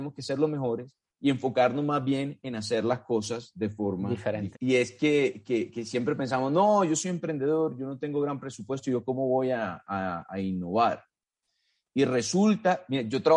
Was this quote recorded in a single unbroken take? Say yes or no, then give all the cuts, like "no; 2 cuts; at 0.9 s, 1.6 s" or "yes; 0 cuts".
no; 1 cut; at 4.5 s